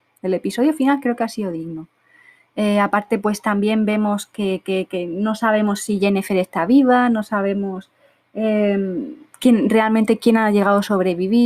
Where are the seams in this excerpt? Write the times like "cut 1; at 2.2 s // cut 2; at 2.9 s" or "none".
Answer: none